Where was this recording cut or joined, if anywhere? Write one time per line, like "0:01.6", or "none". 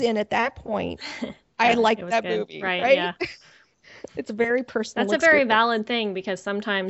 0:03.7